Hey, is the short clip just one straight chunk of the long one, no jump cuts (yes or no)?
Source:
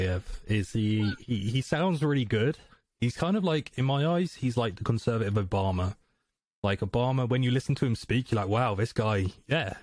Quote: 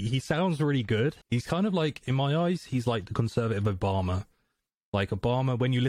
no